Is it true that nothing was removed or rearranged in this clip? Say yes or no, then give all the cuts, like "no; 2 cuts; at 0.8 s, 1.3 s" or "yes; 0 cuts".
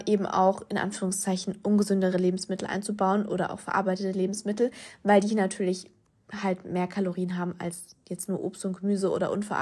yes; 0 cuts